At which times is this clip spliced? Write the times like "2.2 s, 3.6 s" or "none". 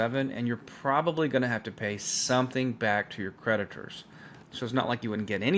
4.4 s